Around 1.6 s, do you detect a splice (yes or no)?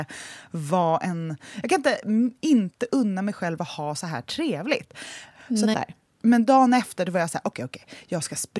no